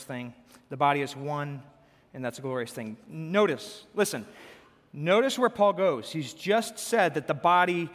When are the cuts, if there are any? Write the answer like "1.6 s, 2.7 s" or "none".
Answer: none

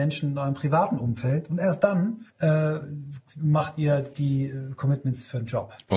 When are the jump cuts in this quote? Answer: 2.3 s

